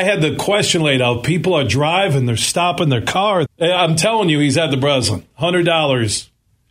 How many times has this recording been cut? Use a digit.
1